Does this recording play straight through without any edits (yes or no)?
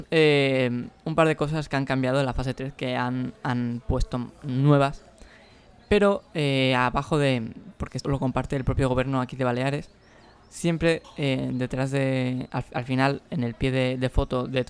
no